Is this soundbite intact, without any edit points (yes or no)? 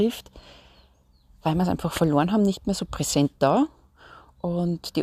yes